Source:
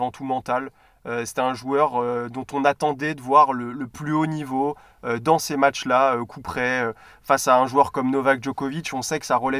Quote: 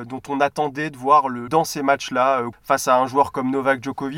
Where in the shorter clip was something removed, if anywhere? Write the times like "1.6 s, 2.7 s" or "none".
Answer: 1.5 s, 2.5 s